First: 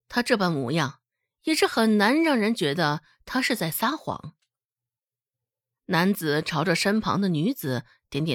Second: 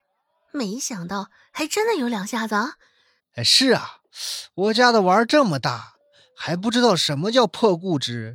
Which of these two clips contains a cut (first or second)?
second